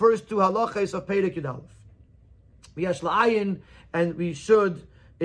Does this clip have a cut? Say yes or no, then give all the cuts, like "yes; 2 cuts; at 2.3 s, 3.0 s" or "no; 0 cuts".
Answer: no; 0 cuts